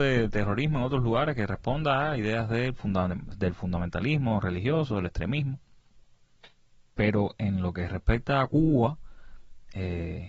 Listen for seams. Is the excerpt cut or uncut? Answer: uncut